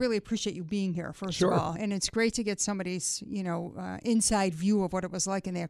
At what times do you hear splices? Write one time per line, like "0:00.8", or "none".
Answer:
none